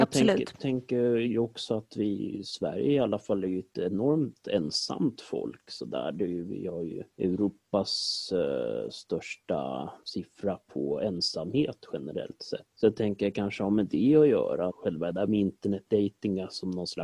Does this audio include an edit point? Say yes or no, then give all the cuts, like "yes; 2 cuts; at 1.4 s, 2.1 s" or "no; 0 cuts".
yes; 1 cut; at 14.7 s